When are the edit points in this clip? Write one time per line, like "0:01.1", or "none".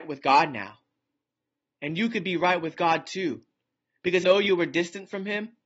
0:04.2

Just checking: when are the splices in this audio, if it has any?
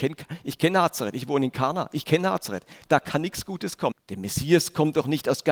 0:03.9

